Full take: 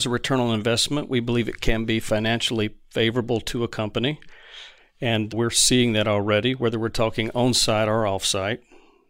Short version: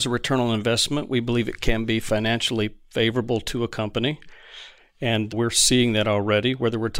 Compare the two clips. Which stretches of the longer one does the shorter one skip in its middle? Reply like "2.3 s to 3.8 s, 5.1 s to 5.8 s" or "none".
none